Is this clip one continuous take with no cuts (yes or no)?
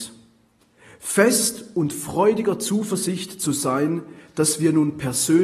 yes